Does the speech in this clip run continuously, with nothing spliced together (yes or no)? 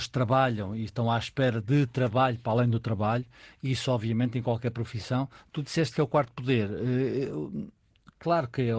yes